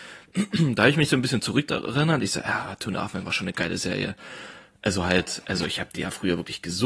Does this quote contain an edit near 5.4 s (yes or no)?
no